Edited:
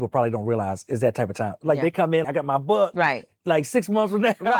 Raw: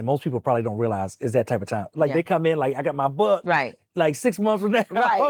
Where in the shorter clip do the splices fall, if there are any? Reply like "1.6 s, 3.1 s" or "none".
2.2 s